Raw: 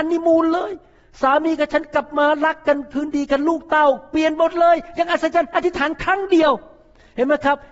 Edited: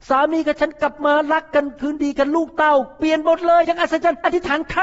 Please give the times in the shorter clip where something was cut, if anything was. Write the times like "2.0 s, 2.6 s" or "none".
3.6 s

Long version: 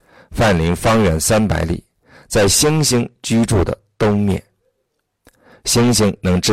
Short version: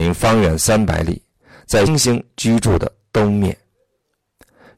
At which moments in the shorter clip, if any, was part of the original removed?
1.9 s

